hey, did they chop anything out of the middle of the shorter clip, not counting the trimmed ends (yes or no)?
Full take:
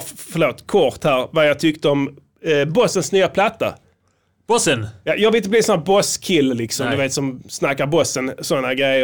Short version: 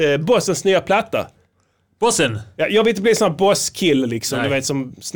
no